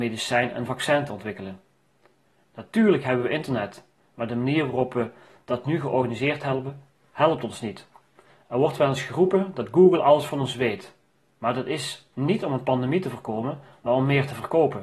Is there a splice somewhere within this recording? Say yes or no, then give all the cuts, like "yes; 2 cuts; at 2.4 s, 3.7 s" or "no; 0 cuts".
no; 0 cuts